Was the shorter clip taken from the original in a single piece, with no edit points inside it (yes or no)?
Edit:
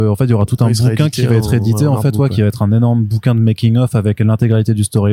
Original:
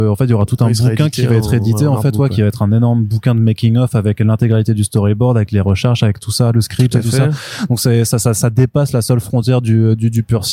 yes